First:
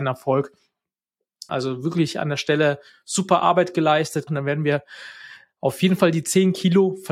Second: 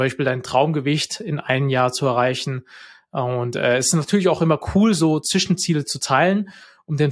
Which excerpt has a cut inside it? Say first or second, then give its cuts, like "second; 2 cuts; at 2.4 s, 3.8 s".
first; 2 cuts; at 1.5 s, 4.3 s